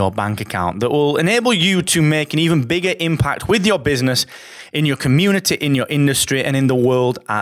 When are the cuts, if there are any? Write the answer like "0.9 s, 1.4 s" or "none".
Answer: none